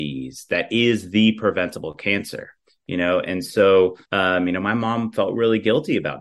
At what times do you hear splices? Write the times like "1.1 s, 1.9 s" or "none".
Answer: 4.0 s